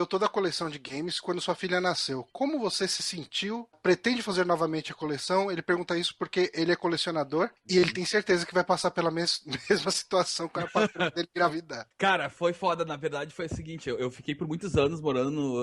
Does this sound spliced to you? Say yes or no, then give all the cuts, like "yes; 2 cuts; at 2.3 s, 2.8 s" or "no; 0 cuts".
no; 0 cuts